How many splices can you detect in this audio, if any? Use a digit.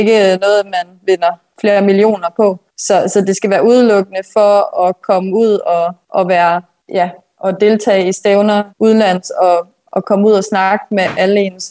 1